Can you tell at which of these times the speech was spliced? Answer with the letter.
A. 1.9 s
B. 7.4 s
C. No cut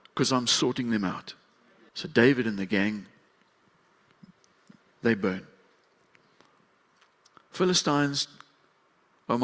A